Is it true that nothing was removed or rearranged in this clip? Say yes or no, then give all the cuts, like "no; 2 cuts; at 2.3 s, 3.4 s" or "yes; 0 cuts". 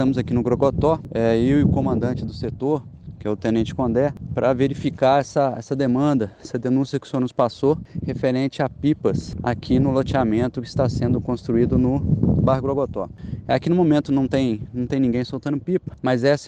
yes; 0 cuts